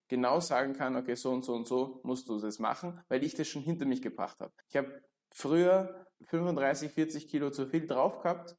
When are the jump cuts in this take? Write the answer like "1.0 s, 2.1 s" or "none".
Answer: 4.6 s, 6.1 s